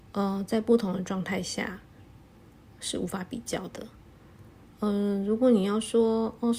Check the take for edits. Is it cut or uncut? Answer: uncut